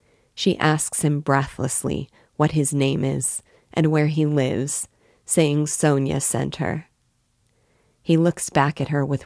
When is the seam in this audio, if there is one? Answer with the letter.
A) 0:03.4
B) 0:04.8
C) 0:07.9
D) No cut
D